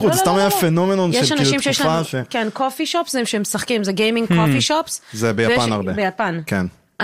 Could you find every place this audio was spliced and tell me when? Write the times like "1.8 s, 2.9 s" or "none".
none